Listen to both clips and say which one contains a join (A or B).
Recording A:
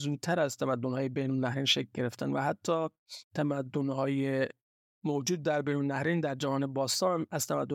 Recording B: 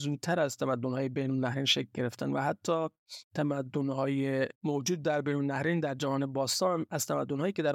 B